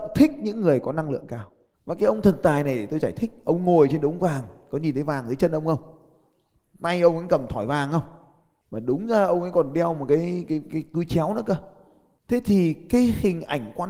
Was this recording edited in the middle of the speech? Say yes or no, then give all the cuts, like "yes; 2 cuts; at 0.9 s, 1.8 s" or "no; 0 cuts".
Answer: no; 0 cuts